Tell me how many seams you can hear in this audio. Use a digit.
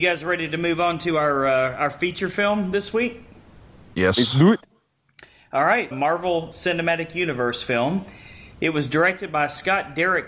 1